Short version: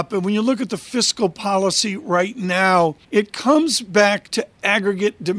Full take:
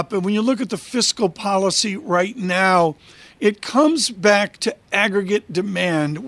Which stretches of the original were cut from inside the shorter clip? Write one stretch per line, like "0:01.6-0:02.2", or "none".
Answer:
0:03.0-0:03.3